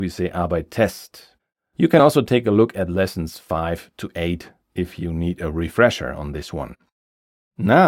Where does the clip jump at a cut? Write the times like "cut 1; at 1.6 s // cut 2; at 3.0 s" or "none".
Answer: none